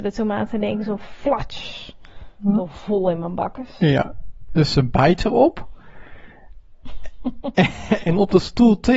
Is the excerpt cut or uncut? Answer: uncut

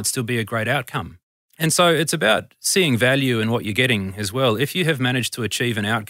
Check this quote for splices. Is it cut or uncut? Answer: uncut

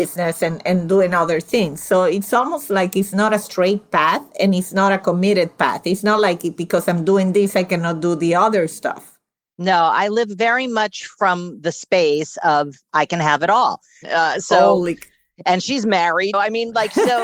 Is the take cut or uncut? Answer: cut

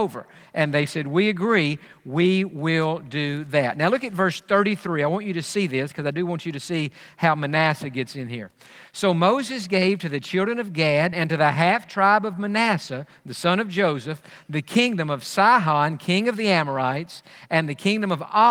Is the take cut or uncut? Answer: cut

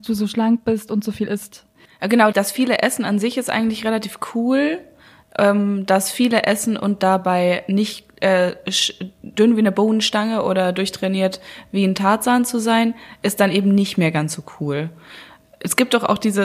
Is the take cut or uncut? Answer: cut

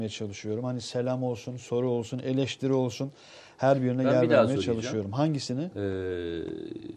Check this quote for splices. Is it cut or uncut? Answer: uncut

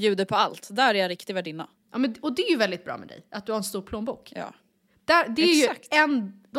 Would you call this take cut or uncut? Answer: uncut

